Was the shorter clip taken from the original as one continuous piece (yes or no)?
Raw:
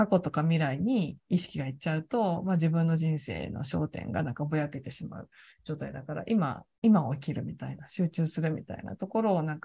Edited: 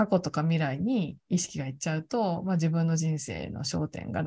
yes